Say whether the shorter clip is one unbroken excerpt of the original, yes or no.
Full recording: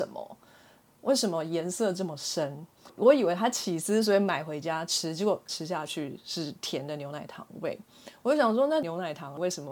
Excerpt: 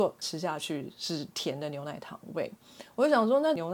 yes